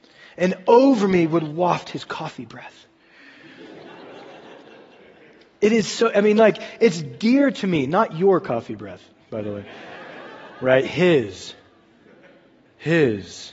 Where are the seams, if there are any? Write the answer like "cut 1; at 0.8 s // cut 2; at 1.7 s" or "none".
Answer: none